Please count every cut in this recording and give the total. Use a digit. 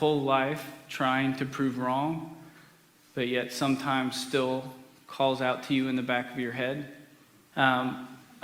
1